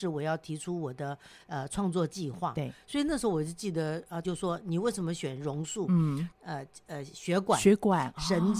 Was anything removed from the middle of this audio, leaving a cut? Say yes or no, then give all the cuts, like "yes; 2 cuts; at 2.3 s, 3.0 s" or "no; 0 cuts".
yes; 2 cuts; at 4.2 s, 6.3 s